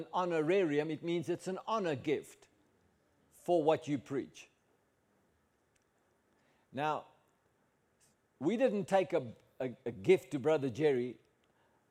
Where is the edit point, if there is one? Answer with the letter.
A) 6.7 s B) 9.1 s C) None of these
C